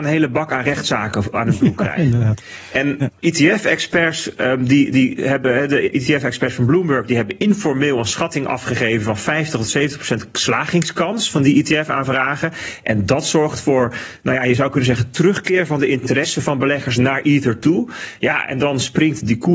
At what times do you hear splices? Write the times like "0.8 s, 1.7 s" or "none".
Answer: 3.2 s